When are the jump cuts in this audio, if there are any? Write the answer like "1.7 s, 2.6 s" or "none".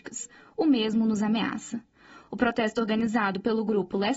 none